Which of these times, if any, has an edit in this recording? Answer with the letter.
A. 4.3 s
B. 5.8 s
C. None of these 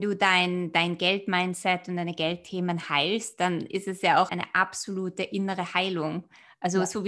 A